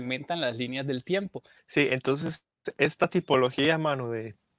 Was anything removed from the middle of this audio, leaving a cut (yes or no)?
yes